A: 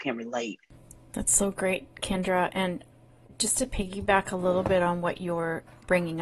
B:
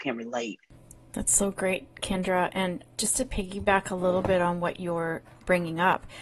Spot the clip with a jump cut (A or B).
B